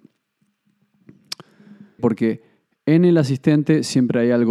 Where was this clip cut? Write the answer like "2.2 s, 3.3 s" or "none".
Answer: 2.0 s